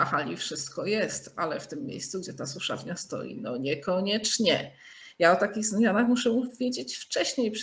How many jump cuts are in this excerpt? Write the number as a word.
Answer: zero